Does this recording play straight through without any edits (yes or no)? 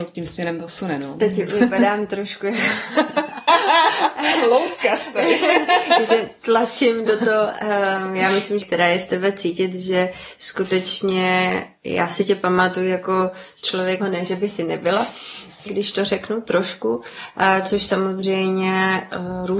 no